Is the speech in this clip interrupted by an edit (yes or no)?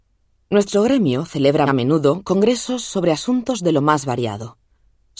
yes